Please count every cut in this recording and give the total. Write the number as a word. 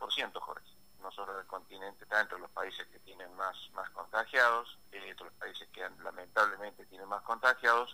three